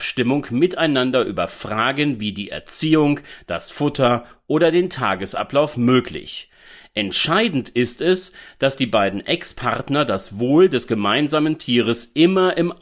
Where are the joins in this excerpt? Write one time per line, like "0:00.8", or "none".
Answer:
none